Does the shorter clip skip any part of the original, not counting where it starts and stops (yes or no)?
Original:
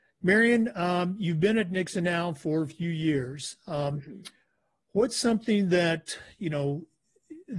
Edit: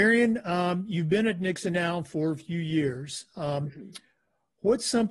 no